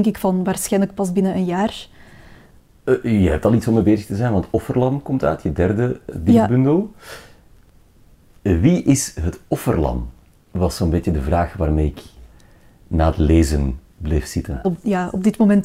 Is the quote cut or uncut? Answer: cut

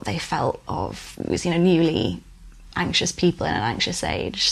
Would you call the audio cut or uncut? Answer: uncut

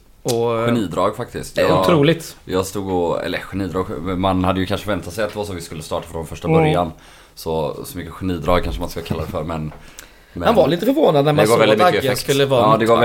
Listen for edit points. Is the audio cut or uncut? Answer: uncut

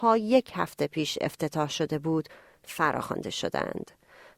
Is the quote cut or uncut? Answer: uncut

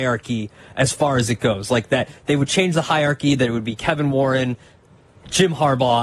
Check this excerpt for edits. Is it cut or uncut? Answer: uncut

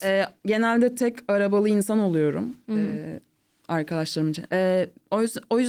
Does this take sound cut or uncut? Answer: cut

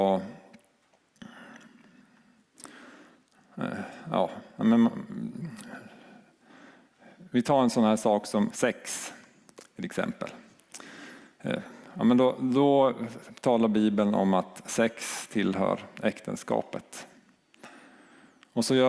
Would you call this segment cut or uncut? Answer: cut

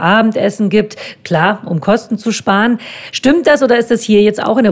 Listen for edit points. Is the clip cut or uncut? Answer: uncut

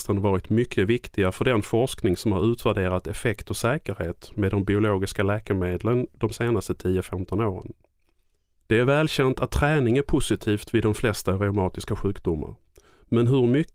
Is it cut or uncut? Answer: uncut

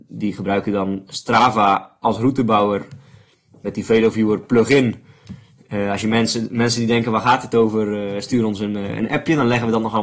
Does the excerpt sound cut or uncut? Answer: uncut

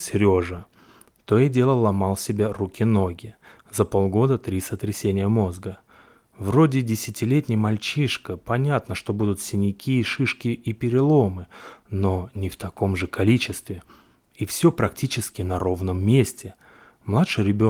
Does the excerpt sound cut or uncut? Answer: uncut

